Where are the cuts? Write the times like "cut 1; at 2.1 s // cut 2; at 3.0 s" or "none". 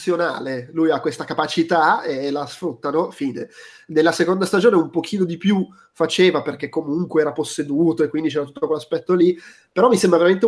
none